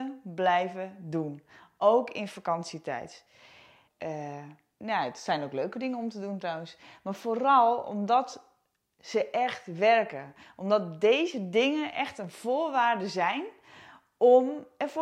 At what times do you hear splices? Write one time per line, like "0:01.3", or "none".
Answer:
0:03.9